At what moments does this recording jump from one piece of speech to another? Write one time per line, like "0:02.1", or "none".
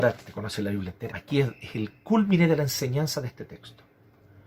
0:01.1

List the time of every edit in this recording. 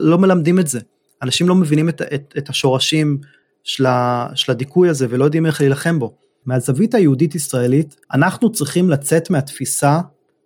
0:06.4
0:08.0

